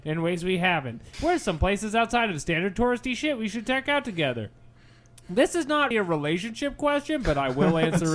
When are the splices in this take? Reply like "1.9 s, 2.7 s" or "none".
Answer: 1.1 s, 5.9 s